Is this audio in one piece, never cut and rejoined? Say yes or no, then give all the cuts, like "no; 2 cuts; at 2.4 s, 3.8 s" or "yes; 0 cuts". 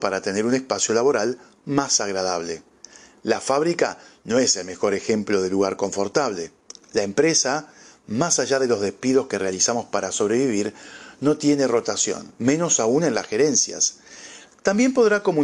no; 3 cuts; at 6.7 s, 12.3 s, 14.5 s